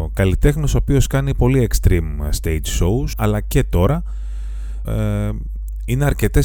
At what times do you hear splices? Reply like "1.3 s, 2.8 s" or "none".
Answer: 3.1 s, 4.9 s